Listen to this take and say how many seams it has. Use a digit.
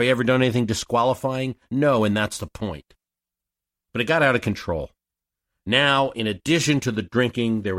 0